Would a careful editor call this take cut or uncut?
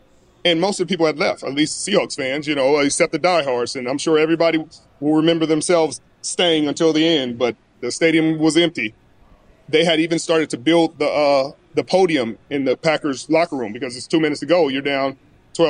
uncut